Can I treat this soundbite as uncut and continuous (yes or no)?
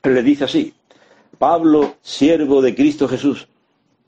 no